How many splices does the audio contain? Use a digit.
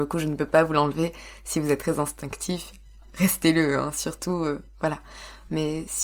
0